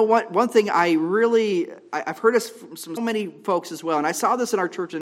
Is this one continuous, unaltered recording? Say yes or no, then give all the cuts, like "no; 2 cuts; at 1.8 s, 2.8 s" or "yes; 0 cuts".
no; 1 cut; at 3.0 s